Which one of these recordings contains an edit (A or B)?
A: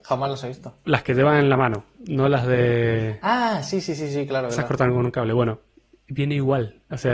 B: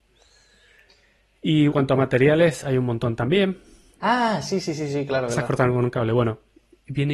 B